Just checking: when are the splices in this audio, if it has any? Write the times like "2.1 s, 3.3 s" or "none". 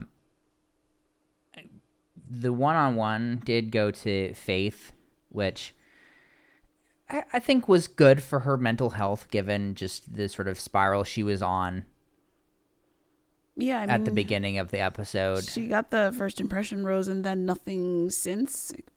none